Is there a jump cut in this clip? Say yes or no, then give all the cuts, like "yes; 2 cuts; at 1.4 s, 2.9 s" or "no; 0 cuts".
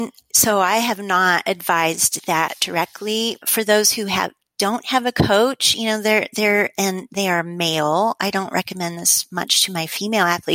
yes; 1 cut; at 3.4 s